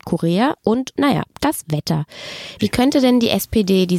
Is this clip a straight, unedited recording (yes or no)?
no